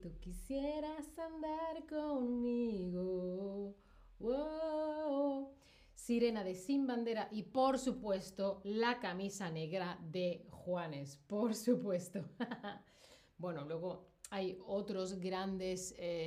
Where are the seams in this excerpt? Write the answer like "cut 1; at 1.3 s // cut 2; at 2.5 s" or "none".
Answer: none